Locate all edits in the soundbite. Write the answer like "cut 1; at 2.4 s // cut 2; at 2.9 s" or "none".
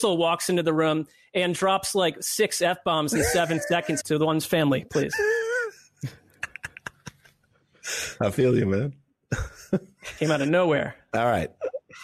cut 1; at 4.0 s